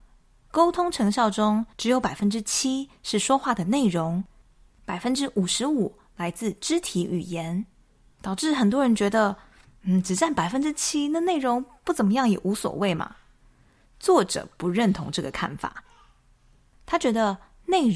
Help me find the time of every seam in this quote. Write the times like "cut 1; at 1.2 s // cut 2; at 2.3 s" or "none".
cut 1; at 4.7 s